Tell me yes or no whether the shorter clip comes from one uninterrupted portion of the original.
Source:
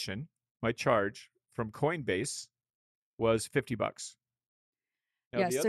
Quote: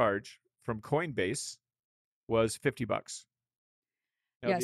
yes